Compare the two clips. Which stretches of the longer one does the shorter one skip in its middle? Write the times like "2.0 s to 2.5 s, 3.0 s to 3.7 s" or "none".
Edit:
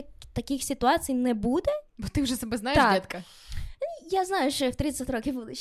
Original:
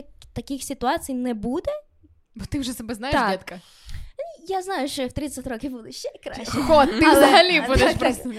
1.9 s to 2.2 s